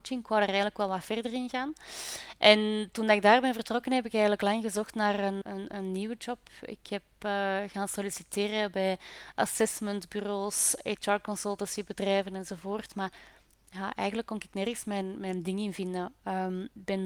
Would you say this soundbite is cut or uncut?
cut